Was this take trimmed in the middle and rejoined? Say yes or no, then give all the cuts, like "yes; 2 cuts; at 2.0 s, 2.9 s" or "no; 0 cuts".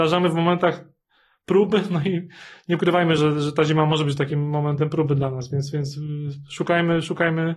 no; 0 cuts